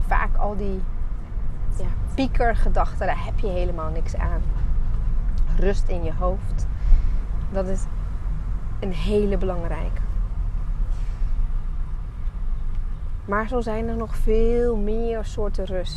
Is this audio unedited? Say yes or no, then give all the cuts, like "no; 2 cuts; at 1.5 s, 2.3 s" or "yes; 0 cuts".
yes; 0 cuts